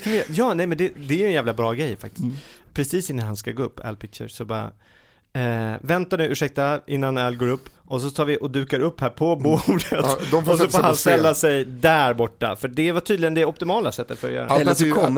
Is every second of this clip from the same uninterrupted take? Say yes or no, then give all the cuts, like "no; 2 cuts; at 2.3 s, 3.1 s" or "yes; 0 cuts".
no; 1 cut; at 7.7 s